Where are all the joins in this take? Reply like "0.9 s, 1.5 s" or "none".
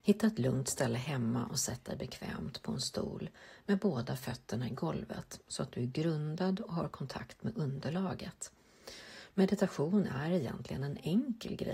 9.3 s